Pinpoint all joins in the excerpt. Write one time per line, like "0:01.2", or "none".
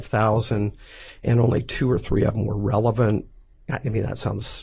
none

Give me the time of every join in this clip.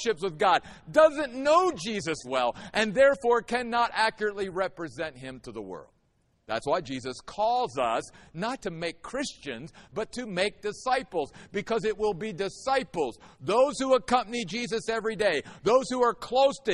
0:02.2
0:08.6

